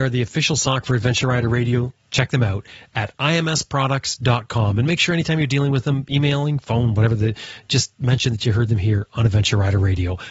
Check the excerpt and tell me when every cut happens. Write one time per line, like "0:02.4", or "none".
0:01.9